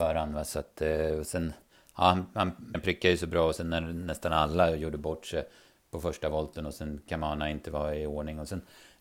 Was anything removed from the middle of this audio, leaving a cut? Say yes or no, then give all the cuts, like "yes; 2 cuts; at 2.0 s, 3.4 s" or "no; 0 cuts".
yes; 1 cut; at 2.7 s